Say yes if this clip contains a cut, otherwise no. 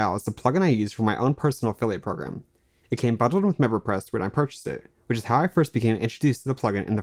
no